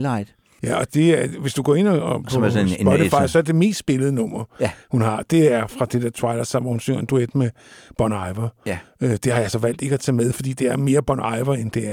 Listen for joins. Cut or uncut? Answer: uncut